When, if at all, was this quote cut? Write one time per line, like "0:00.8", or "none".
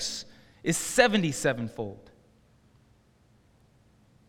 none

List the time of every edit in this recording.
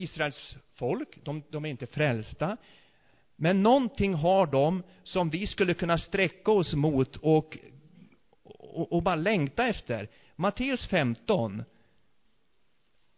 none

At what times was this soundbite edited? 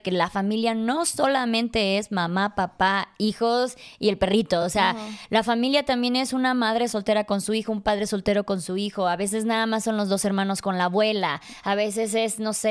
none

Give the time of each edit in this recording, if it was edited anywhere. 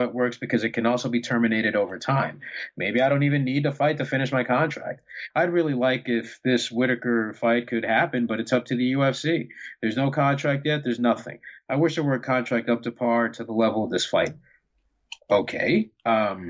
0:05.3

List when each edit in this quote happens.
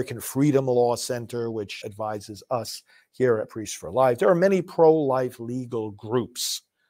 0:01.8

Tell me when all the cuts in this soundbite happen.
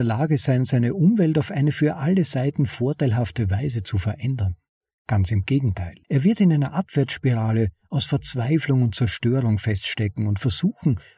0:06.0

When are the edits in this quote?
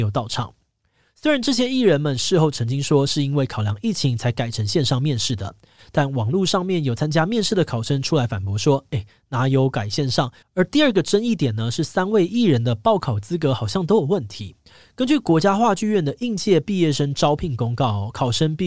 0:10.4

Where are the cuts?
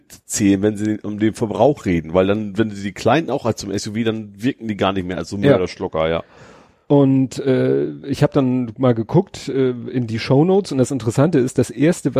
none

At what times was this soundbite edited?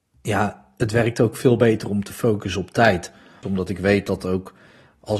0:03.4

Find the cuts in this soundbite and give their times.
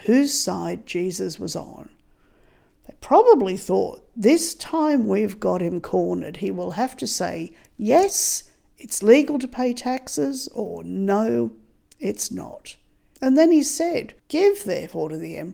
0:13.1
0:14.2

